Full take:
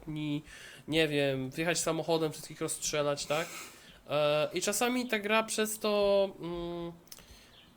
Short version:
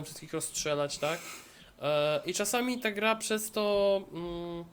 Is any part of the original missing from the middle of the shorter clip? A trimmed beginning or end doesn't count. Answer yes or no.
no